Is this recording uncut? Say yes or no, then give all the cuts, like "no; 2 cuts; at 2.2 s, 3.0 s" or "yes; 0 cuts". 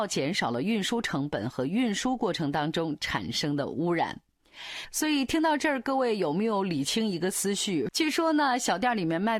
no; 1 cut; at 7.9 s